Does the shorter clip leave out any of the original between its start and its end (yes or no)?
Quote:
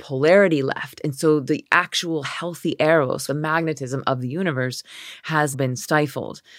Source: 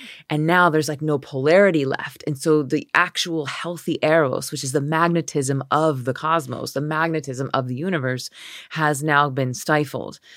yes